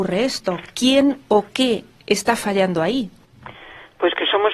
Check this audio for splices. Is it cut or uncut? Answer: uncut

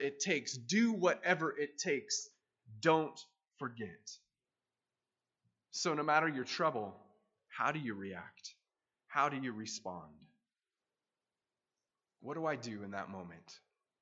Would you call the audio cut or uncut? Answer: uncut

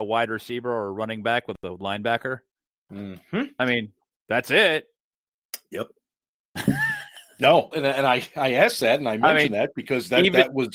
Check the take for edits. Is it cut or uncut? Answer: cut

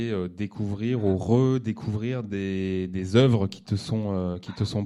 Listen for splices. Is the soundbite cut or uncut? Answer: uncut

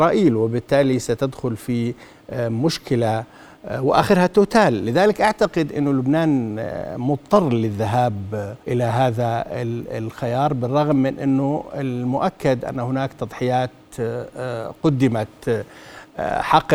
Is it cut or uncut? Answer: cut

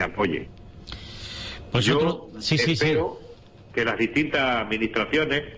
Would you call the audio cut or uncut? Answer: uncut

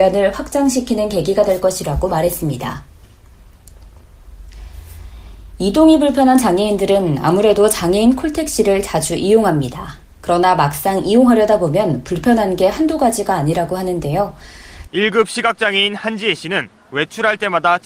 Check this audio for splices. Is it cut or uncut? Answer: cut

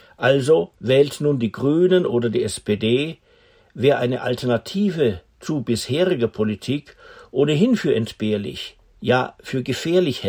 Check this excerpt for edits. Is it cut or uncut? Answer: uncut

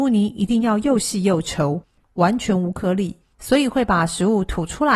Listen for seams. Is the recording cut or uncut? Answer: cut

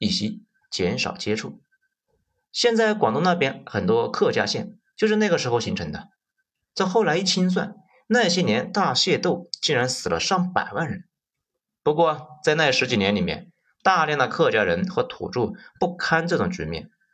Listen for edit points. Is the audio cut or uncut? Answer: uncut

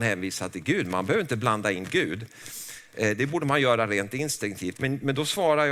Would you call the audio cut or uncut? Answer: cut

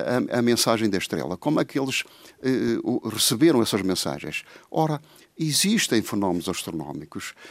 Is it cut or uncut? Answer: uncut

